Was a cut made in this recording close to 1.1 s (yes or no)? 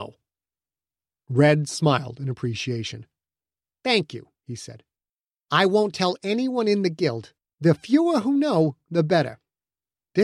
no